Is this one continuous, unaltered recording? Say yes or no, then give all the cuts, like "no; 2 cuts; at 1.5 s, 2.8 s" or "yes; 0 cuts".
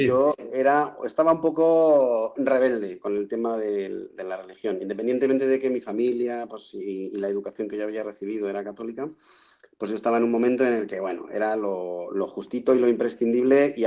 yes; 0 cuts